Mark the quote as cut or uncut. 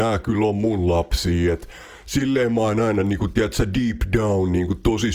uncut